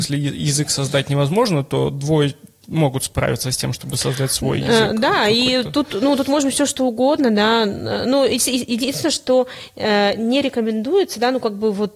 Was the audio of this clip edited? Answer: no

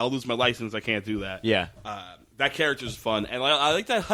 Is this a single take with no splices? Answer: yes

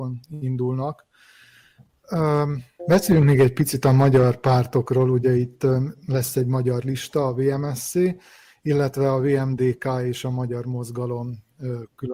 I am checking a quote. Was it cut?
yes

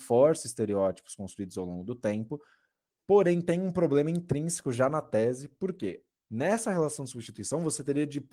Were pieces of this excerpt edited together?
yes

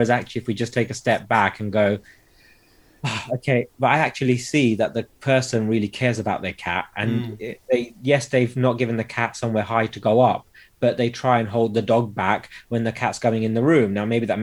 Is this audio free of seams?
yes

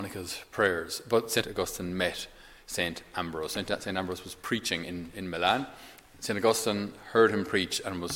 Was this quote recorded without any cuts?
no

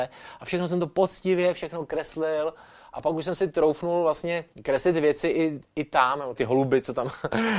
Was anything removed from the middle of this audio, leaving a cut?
yes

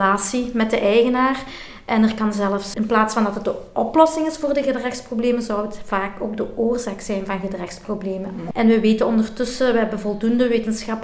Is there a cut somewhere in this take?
yes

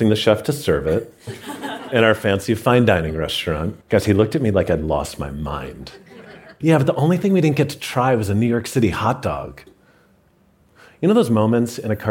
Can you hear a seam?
yes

